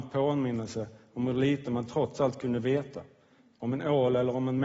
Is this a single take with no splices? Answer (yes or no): yes